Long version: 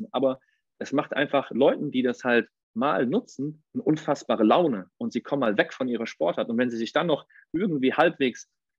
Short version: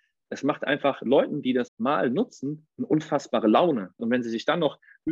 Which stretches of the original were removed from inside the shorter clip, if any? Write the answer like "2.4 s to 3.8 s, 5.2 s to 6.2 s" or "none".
2.2 s to 2.6 s, 5.0 s to 6.5 s